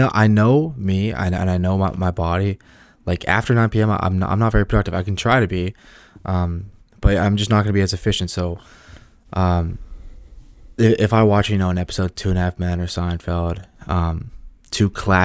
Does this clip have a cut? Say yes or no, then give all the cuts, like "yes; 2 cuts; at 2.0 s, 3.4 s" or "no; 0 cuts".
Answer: no; 0 cuts